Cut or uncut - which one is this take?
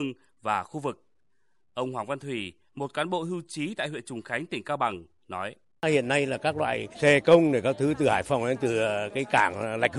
uncut